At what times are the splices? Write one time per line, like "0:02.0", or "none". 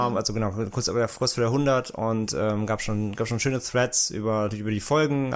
none